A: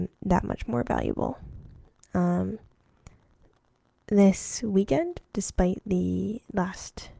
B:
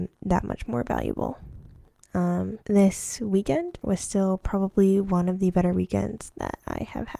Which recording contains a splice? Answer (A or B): B